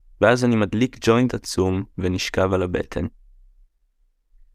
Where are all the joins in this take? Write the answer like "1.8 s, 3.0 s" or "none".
none